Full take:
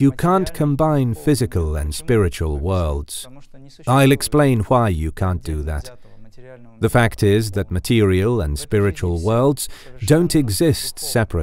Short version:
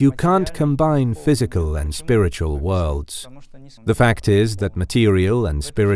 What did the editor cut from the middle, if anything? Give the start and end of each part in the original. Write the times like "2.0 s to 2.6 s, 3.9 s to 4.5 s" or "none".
3.8 s to 6.7 s